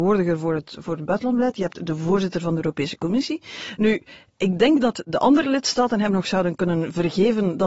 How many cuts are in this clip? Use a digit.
0